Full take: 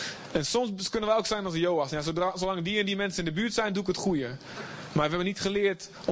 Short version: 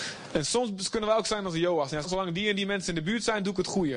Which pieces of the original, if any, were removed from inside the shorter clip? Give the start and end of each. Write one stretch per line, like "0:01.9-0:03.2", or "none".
0:02.0-0:02.3